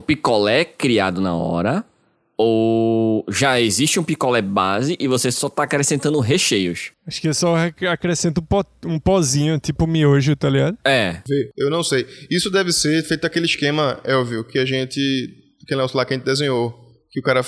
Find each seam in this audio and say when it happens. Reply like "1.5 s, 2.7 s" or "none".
none